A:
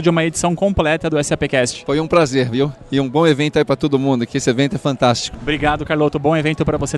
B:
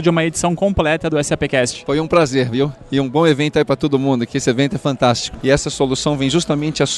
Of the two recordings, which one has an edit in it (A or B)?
B